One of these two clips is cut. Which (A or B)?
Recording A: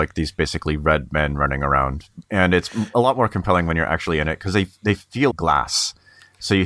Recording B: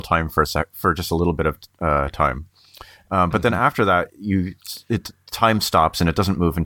A